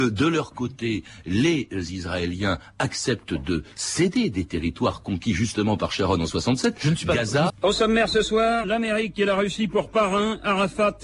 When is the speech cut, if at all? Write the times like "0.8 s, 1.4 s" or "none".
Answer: 7.5 s, 8.6 s